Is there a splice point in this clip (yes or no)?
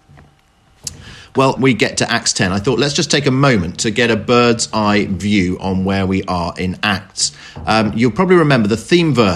yes